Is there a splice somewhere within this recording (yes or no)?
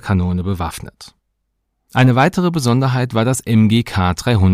no